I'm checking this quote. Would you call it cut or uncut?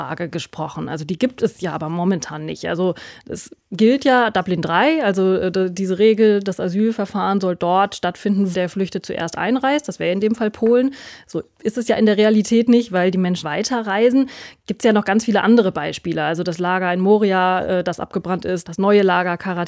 cut